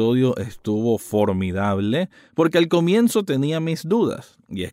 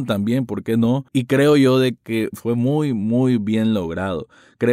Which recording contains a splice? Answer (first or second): second